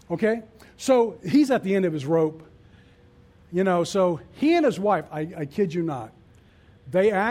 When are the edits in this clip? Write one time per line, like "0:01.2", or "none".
none